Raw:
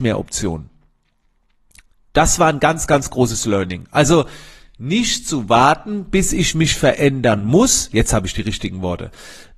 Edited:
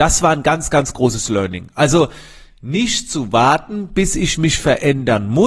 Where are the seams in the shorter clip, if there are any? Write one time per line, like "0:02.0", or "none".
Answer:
none

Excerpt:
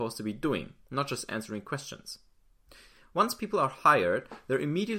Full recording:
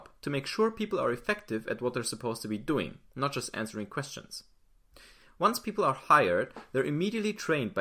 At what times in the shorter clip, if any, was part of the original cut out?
none

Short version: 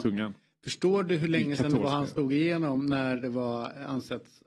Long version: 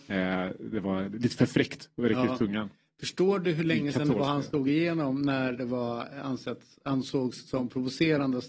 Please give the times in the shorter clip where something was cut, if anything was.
none

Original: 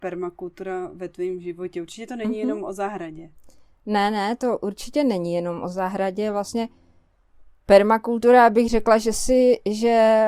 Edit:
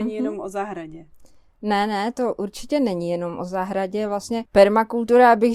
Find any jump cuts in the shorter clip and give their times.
0:04.5

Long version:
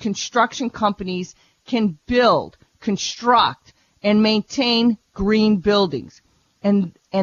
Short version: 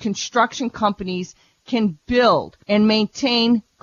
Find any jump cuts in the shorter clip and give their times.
0:02.6

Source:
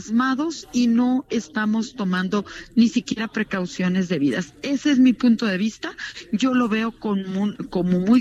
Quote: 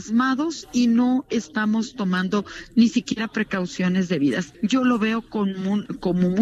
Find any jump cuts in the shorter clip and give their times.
0:04.5

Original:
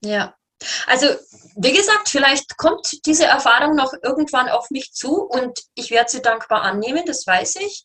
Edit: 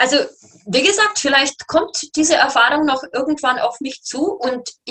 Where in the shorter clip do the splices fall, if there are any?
none

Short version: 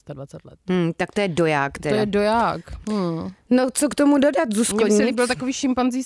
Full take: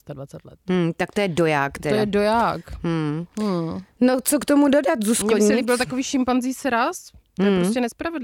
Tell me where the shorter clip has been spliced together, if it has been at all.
0:02.8

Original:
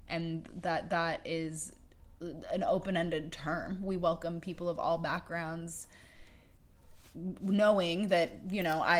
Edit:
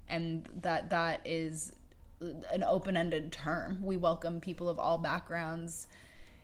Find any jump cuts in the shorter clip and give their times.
none

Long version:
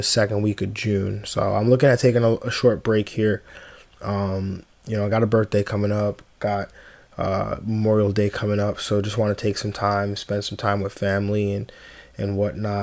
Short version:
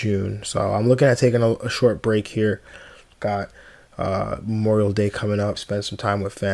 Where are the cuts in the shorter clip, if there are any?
0:03.1
0:05.6

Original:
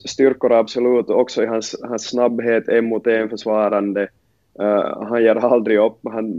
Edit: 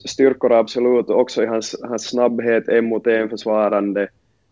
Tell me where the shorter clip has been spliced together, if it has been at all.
none

